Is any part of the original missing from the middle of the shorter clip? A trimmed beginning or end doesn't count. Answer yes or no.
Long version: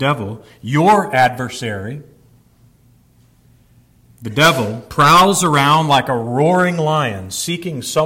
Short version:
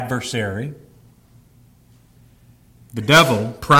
no